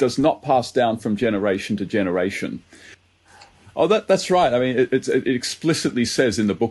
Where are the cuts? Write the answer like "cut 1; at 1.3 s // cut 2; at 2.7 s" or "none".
cut 1; at 3.2 s

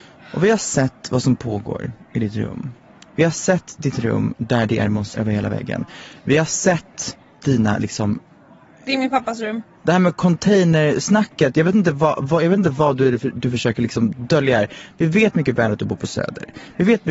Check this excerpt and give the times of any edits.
cut 1; at 5.1 s

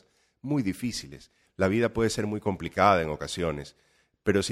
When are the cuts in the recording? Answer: cut 1; at 1.5 s

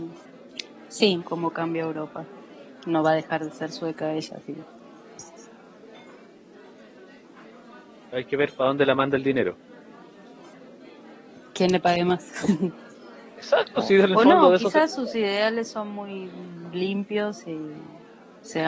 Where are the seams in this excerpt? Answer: cut 1; at 1.2 s

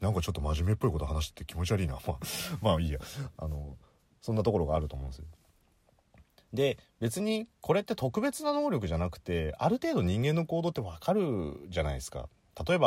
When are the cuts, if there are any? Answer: none

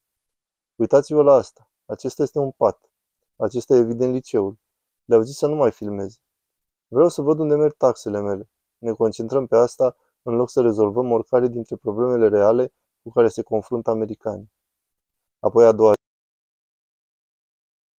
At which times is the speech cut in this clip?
cut 1; at 3.3 s

